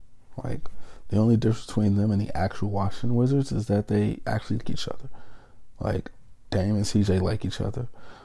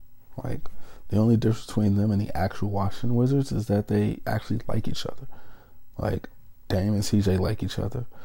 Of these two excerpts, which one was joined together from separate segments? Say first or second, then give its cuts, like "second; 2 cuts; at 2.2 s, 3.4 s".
first; 1 cut; at 4.6 s